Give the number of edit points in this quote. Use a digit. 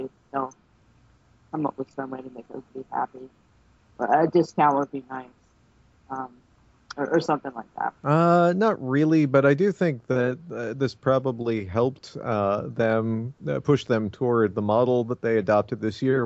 1